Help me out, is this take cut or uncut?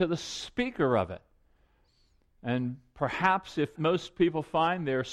cut